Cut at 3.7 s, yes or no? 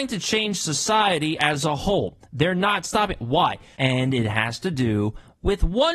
yes